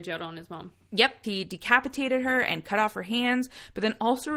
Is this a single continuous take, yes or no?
no